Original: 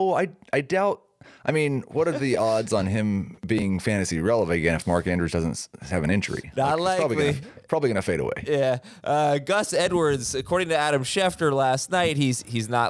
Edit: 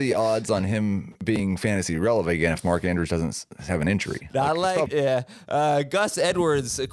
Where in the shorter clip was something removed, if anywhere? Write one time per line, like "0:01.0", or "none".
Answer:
0:04.9